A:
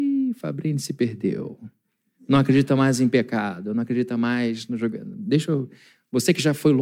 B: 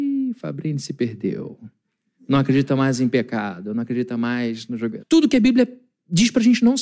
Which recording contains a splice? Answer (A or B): B